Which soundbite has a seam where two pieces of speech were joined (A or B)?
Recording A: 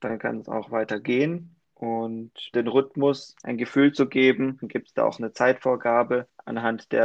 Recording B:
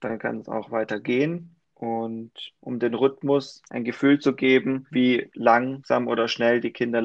A